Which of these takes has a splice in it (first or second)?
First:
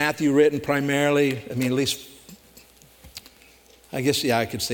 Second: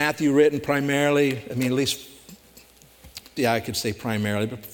second